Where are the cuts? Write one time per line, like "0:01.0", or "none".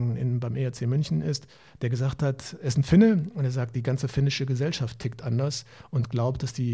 none